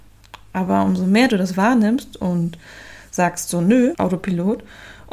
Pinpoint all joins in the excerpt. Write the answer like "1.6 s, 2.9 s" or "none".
3.9 s